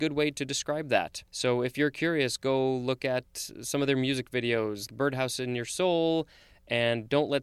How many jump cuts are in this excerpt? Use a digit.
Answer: 2